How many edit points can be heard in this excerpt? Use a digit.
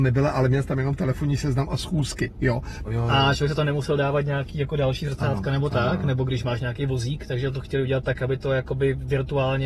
1